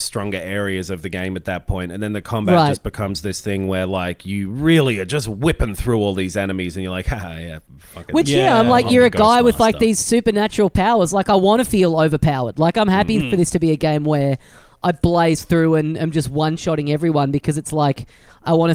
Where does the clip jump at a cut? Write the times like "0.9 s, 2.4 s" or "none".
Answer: none